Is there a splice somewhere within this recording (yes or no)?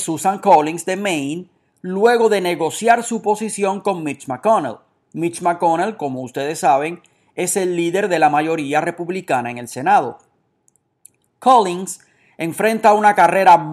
no